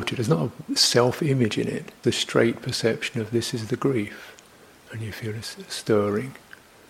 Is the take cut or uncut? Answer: cut